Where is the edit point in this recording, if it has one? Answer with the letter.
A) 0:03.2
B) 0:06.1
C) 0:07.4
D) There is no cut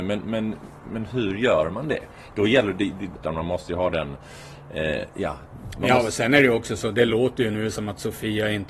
A